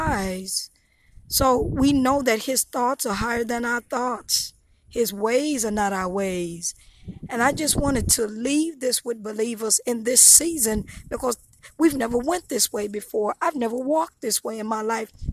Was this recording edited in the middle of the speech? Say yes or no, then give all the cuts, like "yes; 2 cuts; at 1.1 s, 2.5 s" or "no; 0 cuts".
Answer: no; 0 cuts